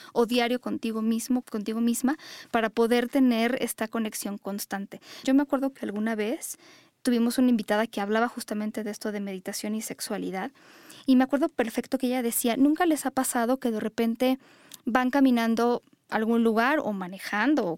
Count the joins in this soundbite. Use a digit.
2